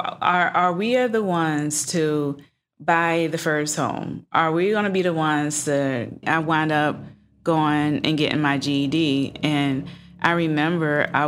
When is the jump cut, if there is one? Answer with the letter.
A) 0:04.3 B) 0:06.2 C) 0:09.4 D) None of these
B